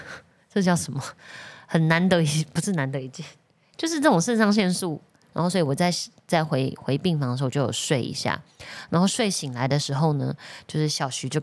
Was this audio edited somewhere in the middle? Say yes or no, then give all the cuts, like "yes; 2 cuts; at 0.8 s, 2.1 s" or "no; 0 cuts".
yes; 1 cut; at 5.3 s